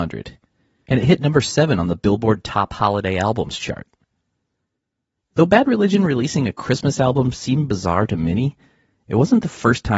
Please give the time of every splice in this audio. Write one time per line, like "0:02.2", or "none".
none